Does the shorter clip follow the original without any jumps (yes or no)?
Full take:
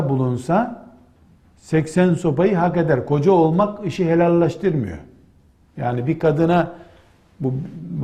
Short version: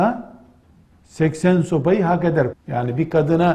no